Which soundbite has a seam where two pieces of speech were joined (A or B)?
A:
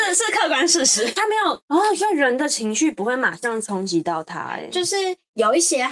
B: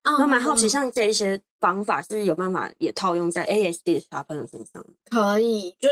A